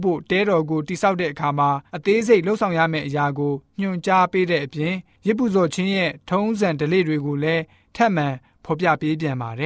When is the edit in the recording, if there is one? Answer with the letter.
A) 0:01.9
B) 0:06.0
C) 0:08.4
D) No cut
A